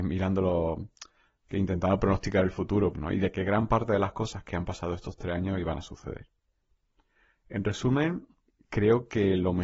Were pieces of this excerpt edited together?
yes; 1 cut; at 2.9 s

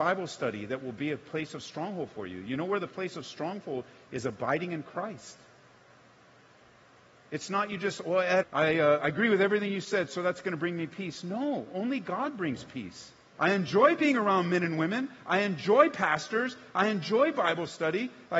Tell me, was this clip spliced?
yes; 2 cuts; at 8.4 s, 13.3 s

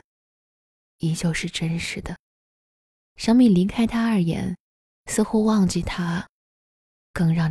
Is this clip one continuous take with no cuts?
yes; 0 cuts

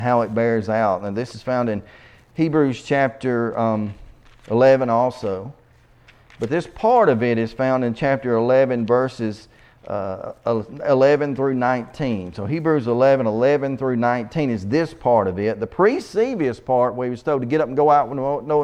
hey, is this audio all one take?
yes; 0 cuts

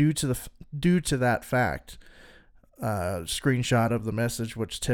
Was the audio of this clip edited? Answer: no; 0 cuts

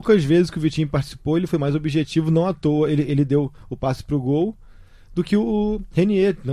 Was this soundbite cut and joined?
no; 0 cuts

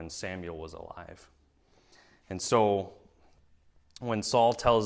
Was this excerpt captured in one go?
yes; 0 cuts

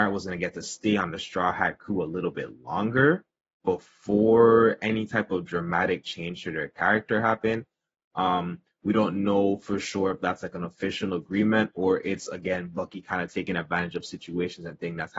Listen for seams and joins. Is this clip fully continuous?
no; 1 cut; at 8.0 s

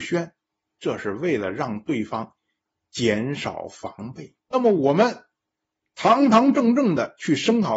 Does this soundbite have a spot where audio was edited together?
yes; 1 cut; at 4.4 s

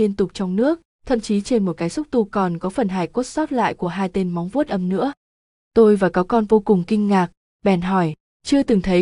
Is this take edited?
no; 0 cuts

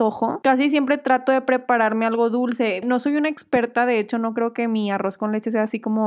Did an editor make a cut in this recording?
yes; 1 cut; at 2.8 s

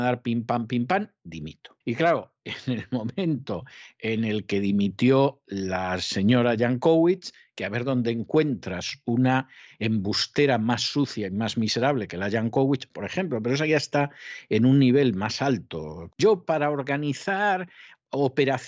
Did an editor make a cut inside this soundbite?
yes; 3 cuts; at 1.8 s, 12.9 s, 16.1 s

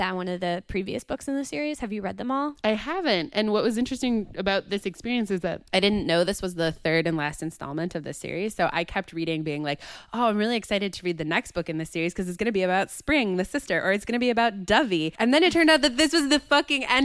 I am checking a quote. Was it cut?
no; 0 cuts

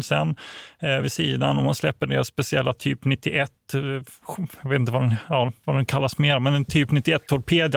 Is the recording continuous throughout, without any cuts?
yes; 0 cuts

